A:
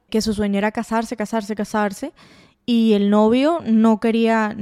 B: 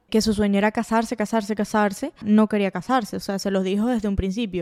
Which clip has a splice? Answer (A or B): B